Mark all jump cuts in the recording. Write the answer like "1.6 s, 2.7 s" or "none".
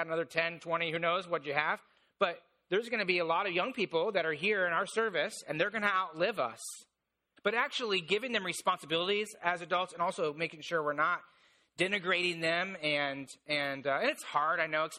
7.4 s